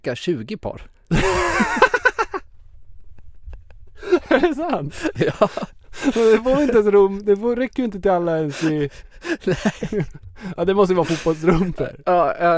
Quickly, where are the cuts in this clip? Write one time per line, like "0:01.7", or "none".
none